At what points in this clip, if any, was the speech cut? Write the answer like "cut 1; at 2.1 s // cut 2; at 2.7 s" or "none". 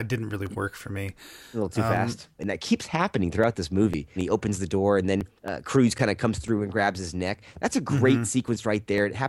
cut 1; at 2.4 s // cut 2; at 4.2 s // cut 3; at 5.4 s